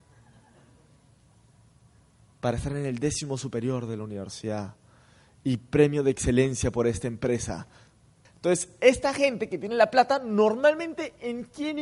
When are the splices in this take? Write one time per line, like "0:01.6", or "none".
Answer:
0:08.2

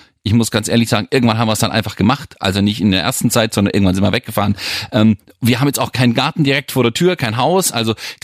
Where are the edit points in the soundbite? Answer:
none

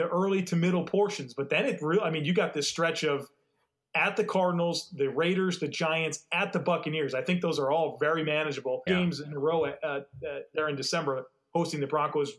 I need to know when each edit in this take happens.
0:08.9

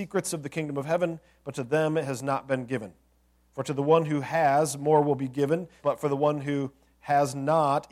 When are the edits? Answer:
0:05.8

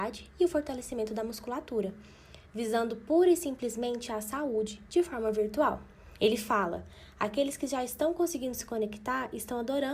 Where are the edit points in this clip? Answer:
0:06.2

